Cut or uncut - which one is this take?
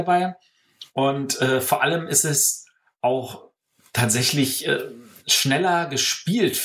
uncut